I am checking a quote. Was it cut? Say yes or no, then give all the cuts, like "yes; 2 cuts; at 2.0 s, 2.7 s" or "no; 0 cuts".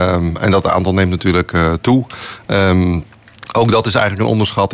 no; 0 cuts